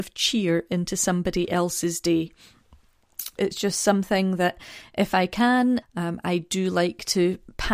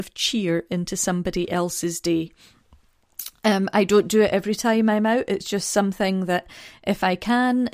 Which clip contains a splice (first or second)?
first